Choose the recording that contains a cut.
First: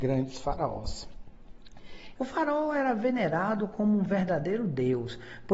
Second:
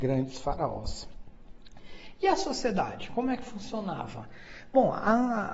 first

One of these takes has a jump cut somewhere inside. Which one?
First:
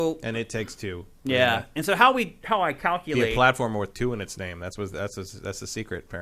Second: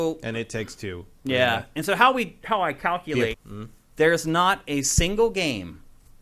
second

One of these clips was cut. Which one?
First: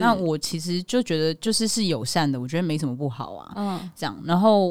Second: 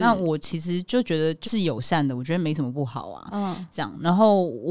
second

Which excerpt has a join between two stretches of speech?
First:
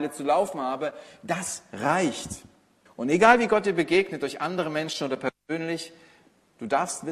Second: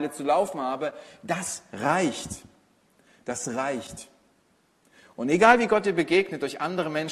first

